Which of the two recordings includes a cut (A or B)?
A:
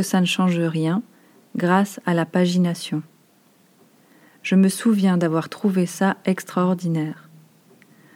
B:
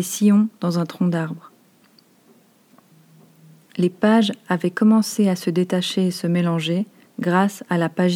B